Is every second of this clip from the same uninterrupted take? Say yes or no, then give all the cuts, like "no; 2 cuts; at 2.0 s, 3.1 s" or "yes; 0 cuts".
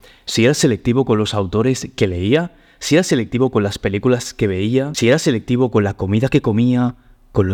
yes; 0 cuts